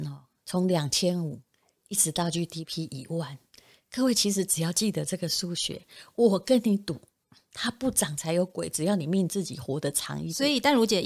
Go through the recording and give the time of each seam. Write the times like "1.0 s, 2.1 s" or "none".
none

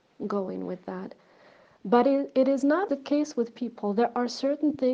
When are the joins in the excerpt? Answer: 2.9 s

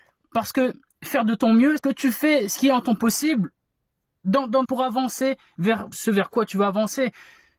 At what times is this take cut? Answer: 1.8 s, 4.6 s, 5.9 s

